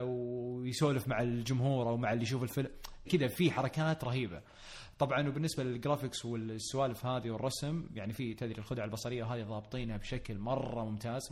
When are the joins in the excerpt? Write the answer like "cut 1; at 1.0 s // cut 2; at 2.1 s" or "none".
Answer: cut 1; at 3.1 s

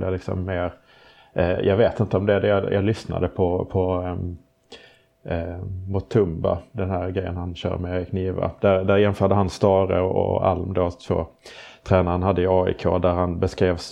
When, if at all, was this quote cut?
none

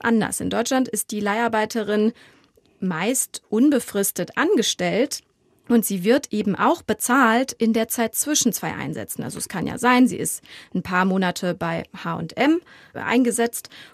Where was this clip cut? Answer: none

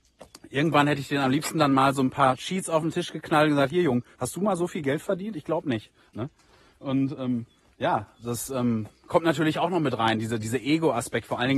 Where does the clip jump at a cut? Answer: cut 1; at 4.1 s

